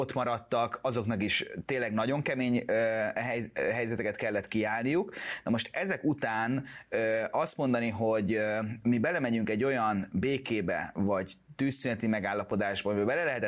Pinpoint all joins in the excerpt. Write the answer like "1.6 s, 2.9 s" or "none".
none